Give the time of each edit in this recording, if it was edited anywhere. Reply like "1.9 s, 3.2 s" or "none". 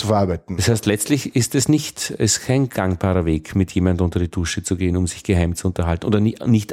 none